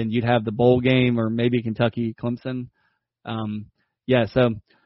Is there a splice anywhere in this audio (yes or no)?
no